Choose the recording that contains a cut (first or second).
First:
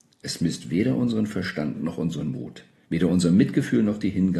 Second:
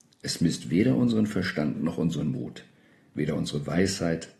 first